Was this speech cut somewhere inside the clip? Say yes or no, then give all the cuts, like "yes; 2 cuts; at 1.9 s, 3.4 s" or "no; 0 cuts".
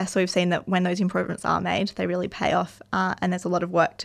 no; 0 cuts